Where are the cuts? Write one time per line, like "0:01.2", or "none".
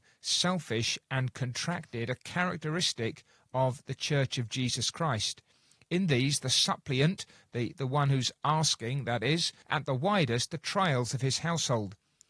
0:09.6